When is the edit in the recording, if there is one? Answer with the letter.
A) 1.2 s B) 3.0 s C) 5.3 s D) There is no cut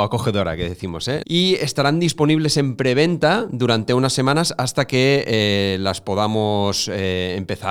A